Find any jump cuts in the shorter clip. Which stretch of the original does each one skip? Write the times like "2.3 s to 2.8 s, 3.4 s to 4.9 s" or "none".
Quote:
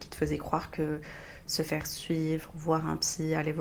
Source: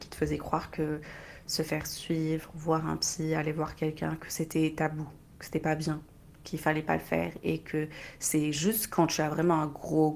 none